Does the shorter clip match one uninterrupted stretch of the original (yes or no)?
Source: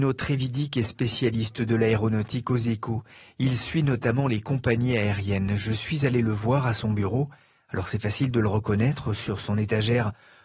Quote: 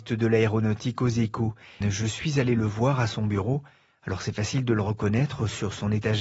no